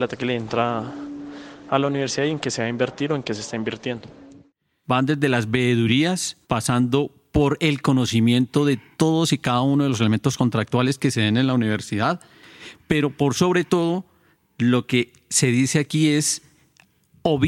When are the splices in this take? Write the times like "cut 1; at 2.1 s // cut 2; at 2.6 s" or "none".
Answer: cut 1; at 4.8 s // cut 2; at 6.4 s